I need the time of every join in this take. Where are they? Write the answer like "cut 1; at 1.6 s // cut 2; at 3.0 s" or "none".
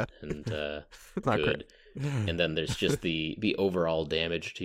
cut 1; at 1.2 s